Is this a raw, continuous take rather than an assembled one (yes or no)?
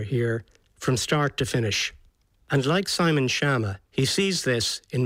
no